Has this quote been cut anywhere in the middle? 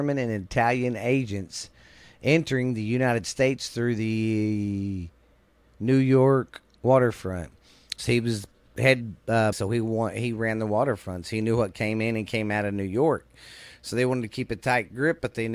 yes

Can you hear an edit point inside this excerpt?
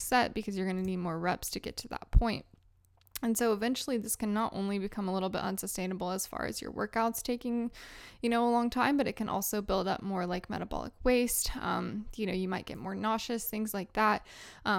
no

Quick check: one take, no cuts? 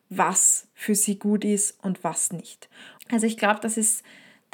no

